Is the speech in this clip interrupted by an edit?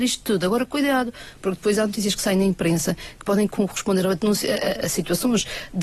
yes; 1 cut; at 3.5 s

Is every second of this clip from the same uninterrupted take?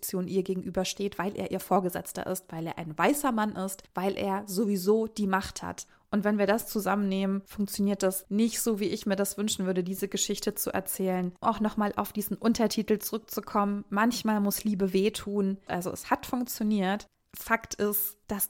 no; 3 cuts; at 8.2 s, 11.4 s, 15.7 s

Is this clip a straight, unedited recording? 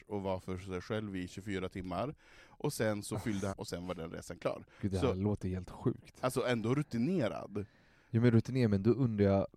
no; 1 cut; at 3.5 s

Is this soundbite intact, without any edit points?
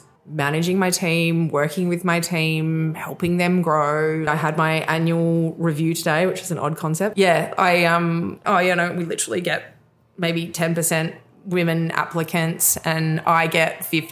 no; 3 cuts; at 4.3 s, 7.1 s, 8.4 s

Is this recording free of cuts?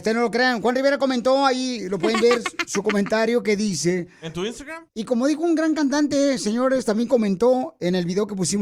no; 1 cut; at 4.9 s

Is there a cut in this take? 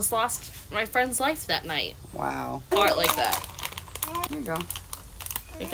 yes; 2 cuts; at 2.7 s, 4.3 s

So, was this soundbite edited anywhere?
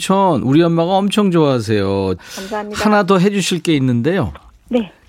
yes; 1 cut; at 2.2 s

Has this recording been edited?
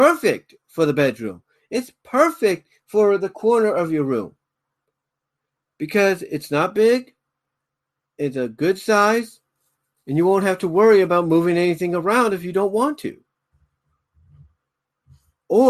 no; 0 cuts

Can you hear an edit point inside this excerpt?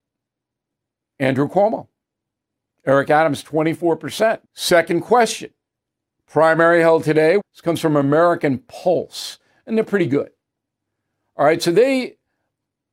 yes; 2 cuts; at 4.4 s, 7.4 s

